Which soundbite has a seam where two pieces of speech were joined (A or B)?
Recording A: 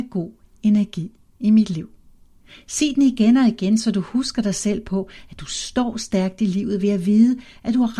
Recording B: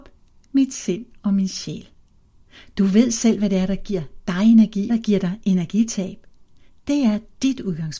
B